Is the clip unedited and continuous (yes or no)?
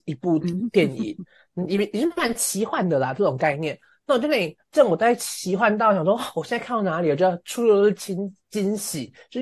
yes